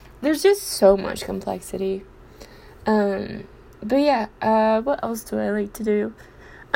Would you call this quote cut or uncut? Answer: uncut